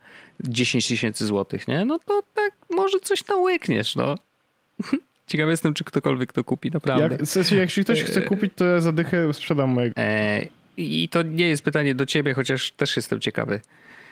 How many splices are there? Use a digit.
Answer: 2